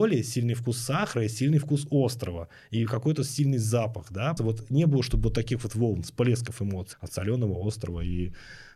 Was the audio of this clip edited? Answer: yes; 2 cuts; at 4.4 s, 6.9 s

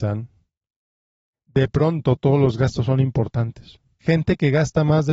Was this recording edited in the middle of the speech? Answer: yes; 2 cuts; at 1.3 s, 4.0 s

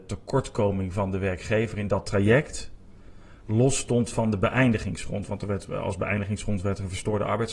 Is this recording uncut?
yes; 0 cuts

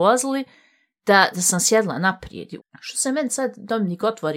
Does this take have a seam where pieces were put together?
yes; 2 cuts; at 1.3 s, 2.6 s

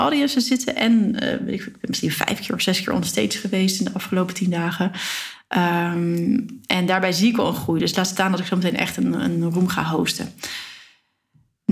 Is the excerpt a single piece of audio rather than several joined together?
yes; 0 cuts

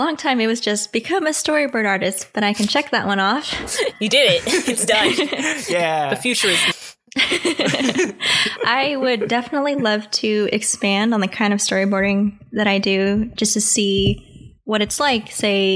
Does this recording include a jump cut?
yes; 1 cut; at 6.7 s

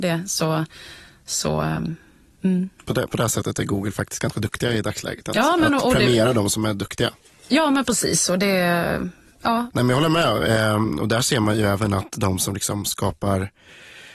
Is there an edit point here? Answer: no; 0 cuts

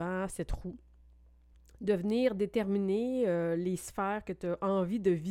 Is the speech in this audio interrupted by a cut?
no; 0 cuts

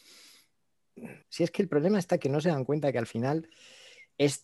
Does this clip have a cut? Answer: yes; 1 cut; at 1.2 s

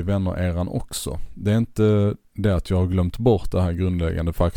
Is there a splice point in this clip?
yes; 1 cut; at 2.2 s

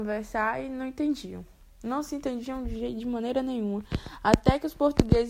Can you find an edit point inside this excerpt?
no; 0 cuts

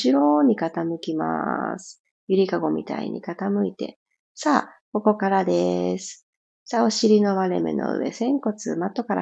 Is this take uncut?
yes; 0 cuts

